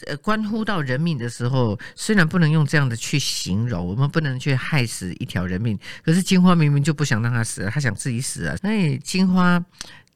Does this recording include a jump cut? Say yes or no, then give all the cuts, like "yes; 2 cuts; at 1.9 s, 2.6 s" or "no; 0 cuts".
yes; 1 cut; at 8.6 s